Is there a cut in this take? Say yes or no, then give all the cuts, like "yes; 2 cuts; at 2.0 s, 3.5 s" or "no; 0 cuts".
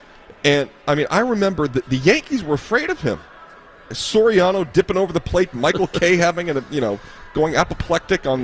yes; 1 cut; at 5.5 s